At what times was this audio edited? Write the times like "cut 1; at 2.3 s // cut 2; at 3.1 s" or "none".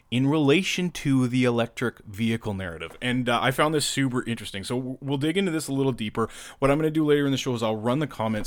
none